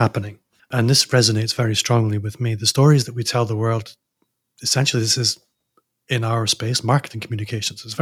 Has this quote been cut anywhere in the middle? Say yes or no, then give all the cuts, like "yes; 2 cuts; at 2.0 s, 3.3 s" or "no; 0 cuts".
no; 0 cuts